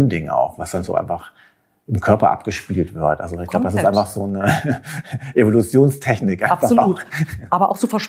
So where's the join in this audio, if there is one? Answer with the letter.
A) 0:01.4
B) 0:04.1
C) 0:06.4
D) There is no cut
D